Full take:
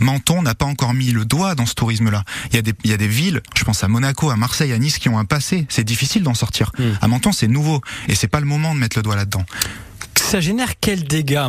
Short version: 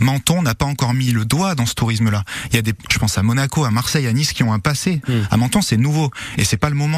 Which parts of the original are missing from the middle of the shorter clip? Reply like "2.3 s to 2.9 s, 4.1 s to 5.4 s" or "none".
2.8 s to 3.5 s, 5.7 s to 6.7 s